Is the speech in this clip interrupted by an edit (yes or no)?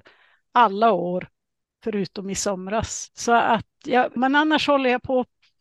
yes